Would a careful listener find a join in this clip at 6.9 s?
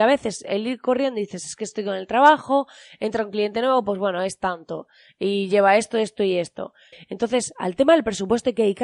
yes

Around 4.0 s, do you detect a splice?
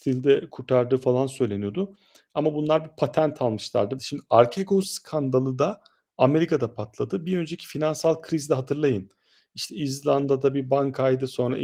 yes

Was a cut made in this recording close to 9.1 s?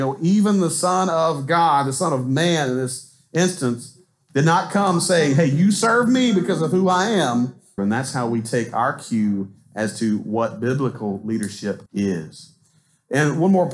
no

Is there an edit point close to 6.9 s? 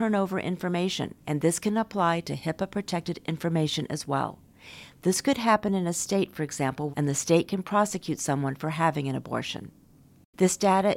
yes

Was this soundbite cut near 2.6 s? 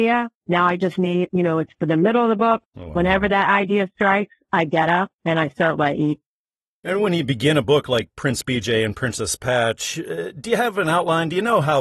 yes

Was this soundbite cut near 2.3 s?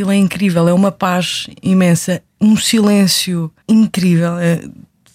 no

